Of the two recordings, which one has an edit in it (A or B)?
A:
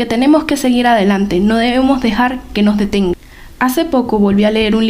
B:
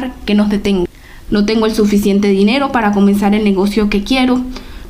B